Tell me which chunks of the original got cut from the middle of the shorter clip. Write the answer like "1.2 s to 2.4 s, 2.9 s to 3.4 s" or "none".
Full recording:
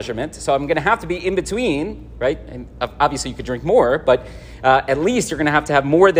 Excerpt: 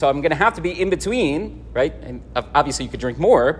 none